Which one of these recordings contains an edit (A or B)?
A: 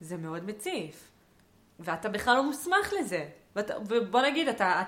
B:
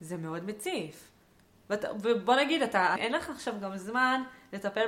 B